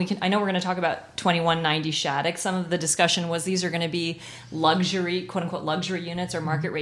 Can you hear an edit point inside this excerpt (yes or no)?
no